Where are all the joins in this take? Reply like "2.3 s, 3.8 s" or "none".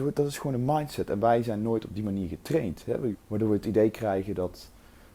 3.1 s